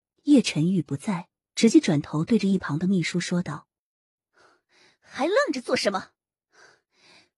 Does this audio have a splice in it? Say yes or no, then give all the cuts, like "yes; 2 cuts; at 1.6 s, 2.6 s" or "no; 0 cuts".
yes; 1 cut; at 1.4 s